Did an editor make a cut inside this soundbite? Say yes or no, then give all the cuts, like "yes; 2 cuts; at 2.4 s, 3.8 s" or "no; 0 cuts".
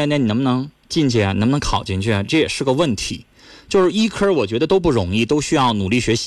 no; 0 cuts